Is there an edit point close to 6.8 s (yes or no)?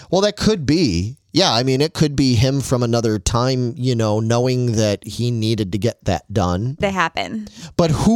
yes